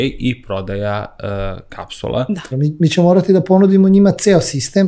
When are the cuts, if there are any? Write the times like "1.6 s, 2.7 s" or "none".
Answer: 2.5 s